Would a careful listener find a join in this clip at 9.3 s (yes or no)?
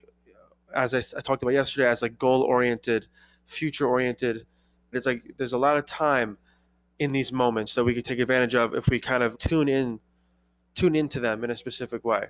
yes